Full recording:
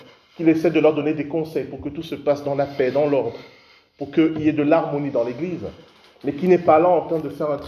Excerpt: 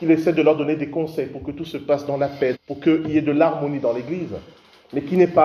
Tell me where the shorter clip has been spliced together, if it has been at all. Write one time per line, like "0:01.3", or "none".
0:02.5